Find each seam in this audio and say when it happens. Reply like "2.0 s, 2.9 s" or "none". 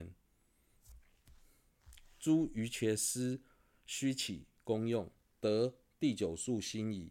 5.2 s